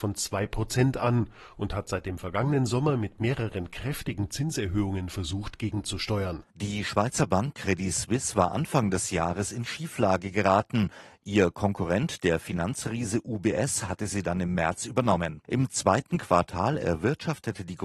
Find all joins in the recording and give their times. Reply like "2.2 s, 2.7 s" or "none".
6.5 s, 15.4 s